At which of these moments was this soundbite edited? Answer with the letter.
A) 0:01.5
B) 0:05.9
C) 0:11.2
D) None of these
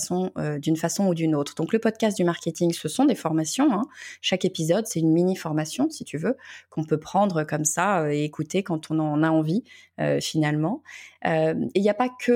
D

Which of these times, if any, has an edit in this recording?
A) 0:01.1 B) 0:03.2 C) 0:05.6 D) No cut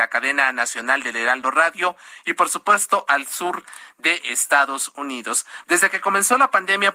C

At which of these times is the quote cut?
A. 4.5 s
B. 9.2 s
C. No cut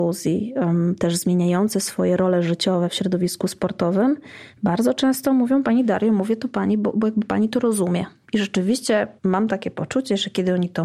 B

